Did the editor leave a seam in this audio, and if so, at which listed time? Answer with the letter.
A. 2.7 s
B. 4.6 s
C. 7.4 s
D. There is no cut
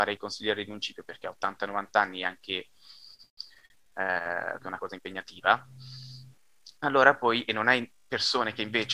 B